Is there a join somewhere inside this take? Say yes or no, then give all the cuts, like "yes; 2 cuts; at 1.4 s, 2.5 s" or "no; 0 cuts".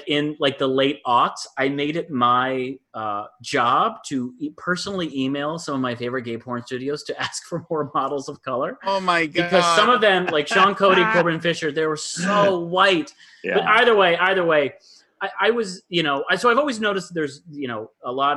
no; 0 cuts